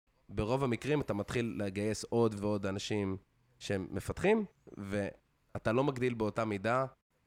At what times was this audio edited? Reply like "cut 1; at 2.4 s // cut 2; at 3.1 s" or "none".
cut 1; at 2.4 s